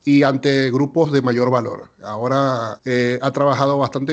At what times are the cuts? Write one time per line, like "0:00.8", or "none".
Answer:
0:02.8